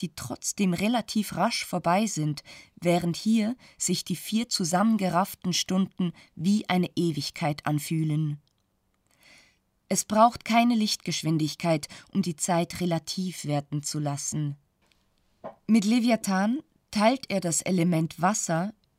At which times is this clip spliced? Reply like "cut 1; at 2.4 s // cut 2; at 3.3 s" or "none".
none